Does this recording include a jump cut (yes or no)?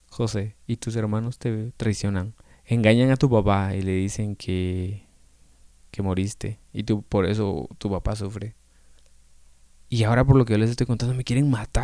yes